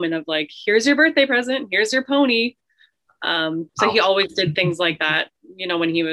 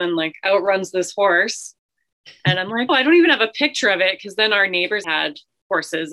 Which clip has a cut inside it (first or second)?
second